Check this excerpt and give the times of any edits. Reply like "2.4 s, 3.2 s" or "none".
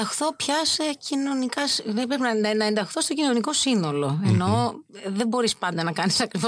none

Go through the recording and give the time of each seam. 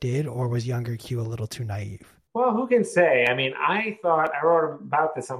2.3 s

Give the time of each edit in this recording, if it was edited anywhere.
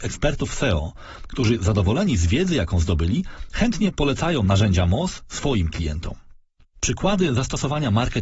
6.6 s

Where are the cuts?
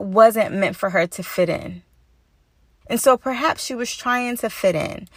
2.8 s

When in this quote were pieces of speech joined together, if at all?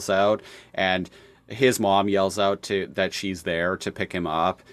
none

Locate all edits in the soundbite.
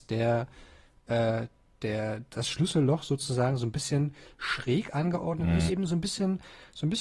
5.7 s

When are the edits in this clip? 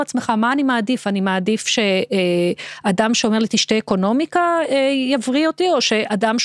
none

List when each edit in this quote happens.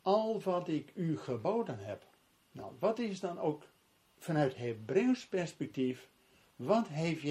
none

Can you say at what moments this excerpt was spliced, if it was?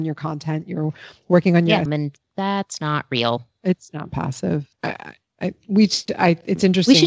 1.9 s, 4.7 s

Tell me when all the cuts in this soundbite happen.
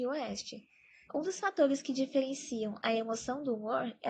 1.1 s

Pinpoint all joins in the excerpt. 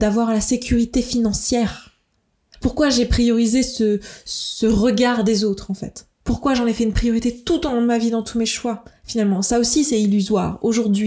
2.5 s

